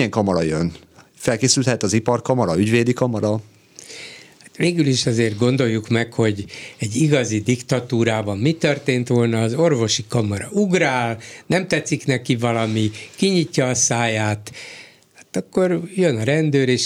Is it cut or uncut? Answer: uncut